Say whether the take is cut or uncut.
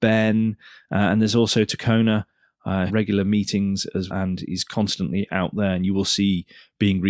cut